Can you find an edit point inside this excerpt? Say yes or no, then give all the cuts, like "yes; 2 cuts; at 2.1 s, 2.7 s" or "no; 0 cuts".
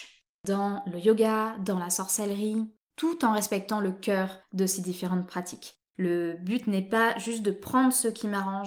no; 0 cuts